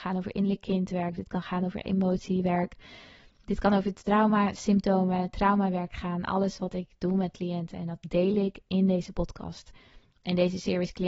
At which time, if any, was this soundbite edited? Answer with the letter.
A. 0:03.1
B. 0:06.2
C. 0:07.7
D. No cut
D